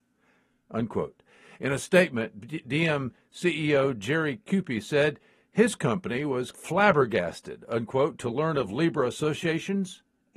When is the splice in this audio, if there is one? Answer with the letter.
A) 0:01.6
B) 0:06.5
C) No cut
B